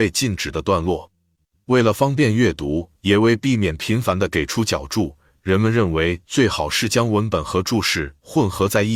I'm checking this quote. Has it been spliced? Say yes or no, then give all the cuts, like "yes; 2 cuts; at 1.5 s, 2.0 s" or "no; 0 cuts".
no; 0 cuts